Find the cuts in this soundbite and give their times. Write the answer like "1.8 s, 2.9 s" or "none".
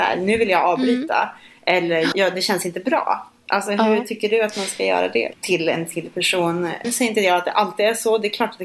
2.1 s, 5.3 s, 6.8 s